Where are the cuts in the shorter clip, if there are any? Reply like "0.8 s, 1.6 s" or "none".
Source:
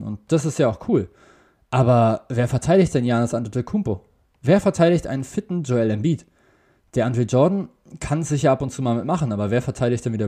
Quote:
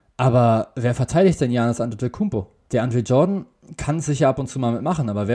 2.7 s